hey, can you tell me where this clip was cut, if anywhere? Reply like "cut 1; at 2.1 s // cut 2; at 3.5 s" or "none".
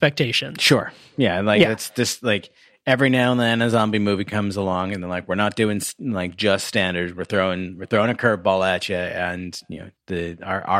none

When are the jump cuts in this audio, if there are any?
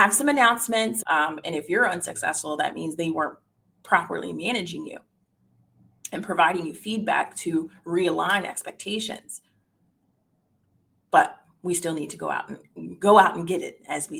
cut 1; at 1.0 s

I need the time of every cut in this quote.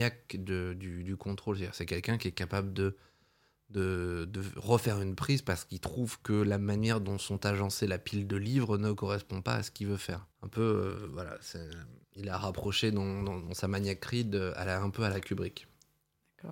cut 1; at 10.3 s // cut 2; at 12.0 s

